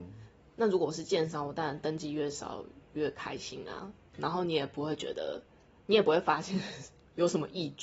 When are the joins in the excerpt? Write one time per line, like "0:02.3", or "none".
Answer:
none